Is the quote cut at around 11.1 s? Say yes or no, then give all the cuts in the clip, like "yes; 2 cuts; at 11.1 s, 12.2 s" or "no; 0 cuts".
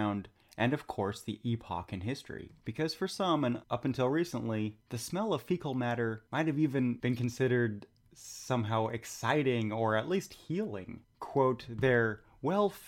yes; 1 cut; at 11.1 s